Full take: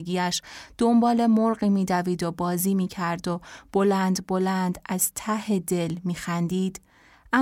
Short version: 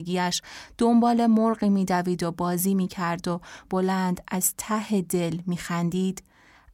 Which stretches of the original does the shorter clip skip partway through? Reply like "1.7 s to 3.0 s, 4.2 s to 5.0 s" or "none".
3.7 s to 4.2 s